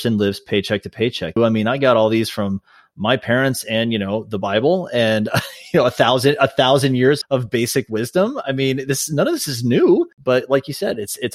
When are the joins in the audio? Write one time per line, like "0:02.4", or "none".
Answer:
0:01.4
0:07.2
0:10.1

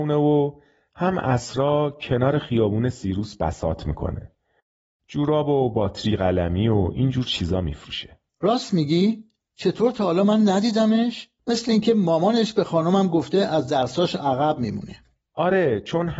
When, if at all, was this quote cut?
0:11.4

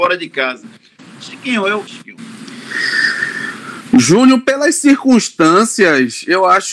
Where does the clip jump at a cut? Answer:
0:01.9

